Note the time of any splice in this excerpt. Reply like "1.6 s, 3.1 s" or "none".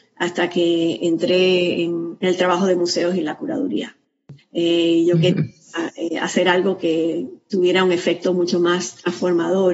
4.4 s